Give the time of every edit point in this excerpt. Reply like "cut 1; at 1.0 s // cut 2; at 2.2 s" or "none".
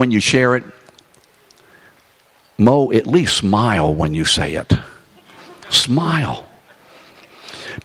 none

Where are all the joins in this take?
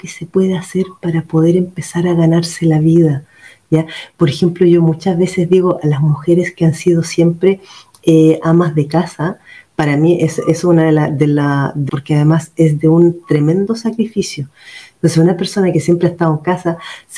cut 1; at 11.9 s

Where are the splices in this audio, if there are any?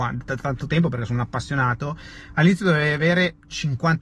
none

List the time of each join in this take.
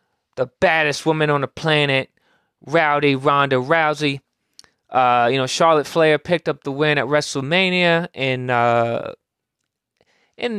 none

